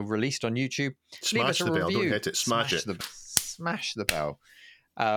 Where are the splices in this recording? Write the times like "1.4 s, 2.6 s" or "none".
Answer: 3.0 s